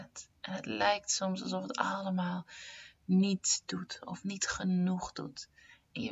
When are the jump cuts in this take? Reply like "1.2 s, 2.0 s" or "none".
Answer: none